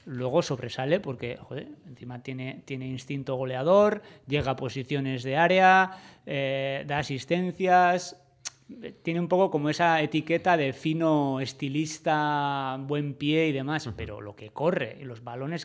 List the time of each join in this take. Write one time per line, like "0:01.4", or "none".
none

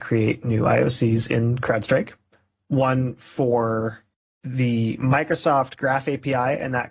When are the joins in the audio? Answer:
none

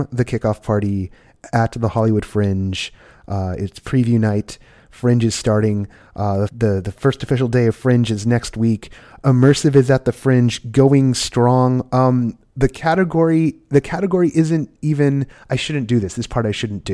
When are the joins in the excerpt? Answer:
0:06.5

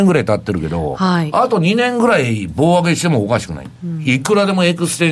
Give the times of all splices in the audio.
none

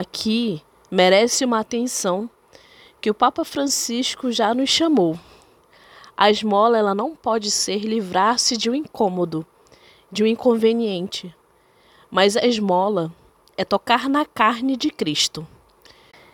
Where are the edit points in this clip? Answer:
none

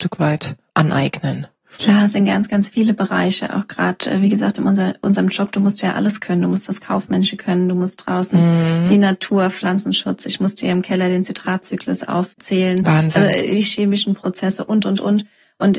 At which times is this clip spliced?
none

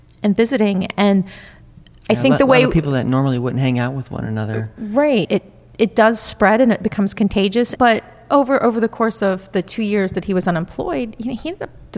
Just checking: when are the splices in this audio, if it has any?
0:05.2
0:07.8

